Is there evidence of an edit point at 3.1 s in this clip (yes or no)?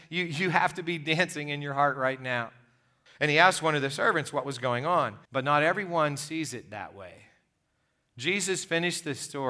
yes